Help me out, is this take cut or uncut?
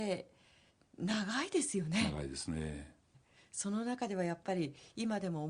cut